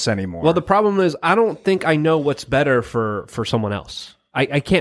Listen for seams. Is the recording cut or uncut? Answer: uncut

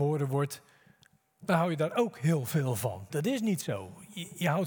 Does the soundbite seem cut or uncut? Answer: cut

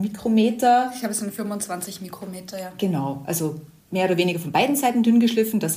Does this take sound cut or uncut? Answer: uncut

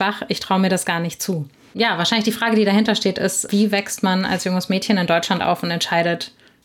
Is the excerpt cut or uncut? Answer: cut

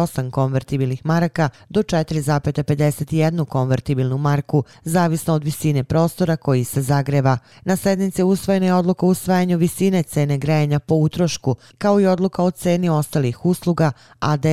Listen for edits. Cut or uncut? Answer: cut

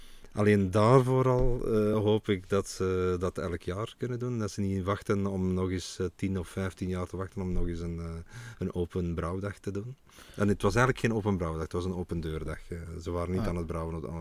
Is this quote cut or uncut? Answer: uncut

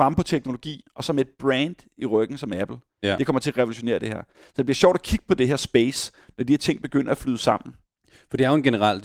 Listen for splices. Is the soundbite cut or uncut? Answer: uncut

